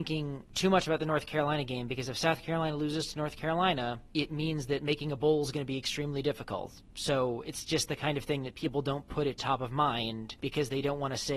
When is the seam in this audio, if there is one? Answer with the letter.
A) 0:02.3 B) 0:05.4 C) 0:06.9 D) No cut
D